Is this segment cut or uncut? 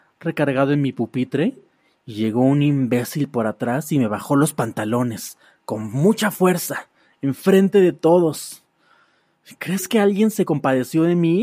uncut